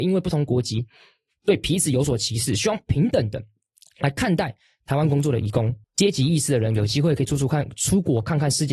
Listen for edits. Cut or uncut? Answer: cut